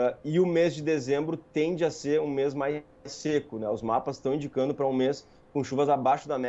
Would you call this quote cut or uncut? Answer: uncut